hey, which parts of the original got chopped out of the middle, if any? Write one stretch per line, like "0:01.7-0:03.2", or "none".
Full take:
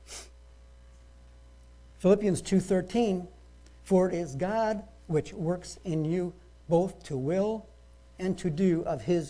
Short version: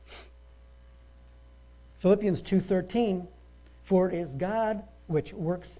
none